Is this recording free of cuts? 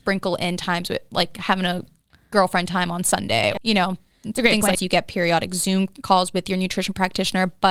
no; 2 cuts; at 3.6 s, 4.7 s

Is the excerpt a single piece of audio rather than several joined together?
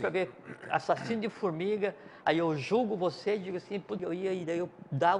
no; 1 cut; at 4.0 s

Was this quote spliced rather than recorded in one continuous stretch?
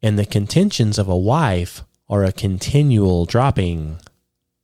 no; 0 cuts

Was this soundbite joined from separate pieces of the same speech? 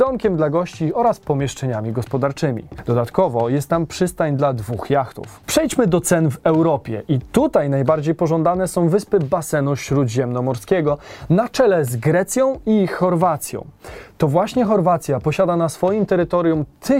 no; 0 cuts

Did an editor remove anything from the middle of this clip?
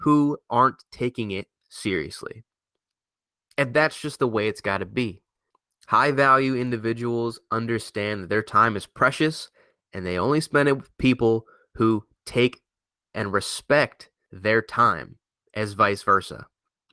no; 0 cuts

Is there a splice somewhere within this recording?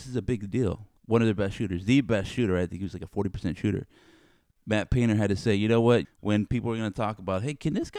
yes; 2 cuts; at 1.0 s, 6.0 s

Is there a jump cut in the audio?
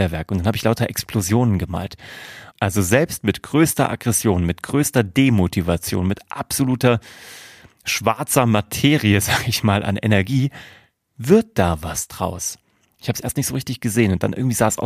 yes; 1 cut; at 2.5 s

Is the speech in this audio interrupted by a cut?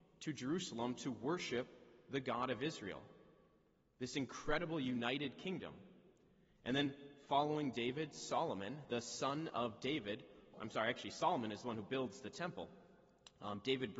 yes; 1 cut; at 10.5 s

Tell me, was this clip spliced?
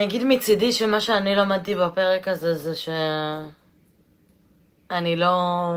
no; 0 cuts

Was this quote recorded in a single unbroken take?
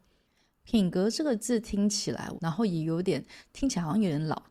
no; 1 cut; at 2.3 s

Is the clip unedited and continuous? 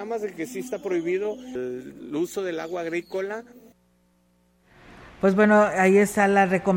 yes; 0 cuts

